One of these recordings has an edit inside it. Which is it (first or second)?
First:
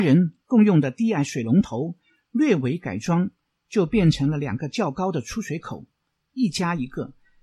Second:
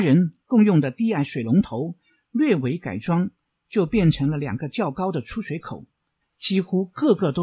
second